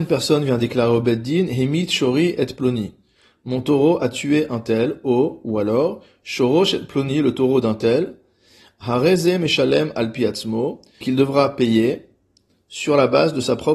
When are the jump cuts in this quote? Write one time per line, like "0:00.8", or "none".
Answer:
0:11.0